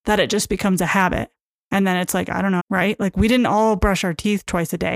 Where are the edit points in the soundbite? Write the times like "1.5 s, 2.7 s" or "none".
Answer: 2.6 s